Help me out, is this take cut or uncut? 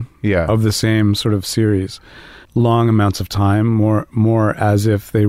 cut